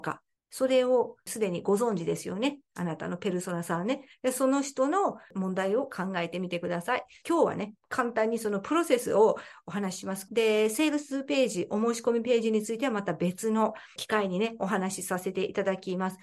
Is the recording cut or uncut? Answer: cut